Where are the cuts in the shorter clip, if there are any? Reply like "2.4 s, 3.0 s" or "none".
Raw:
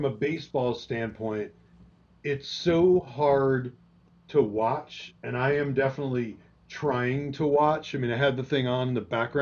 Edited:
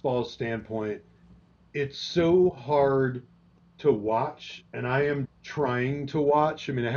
5.3 s